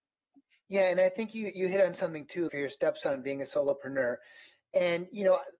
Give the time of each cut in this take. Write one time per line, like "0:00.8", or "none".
0:02.5